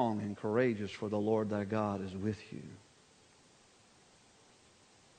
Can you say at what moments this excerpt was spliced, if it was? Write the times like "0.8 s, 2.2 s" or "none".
none